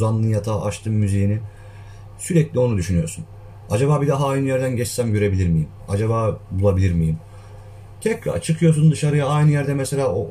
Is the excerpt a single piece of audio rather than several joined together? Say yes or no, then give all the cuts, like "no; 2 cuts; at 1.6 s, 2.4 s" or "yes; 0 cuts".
yes; 0 cuts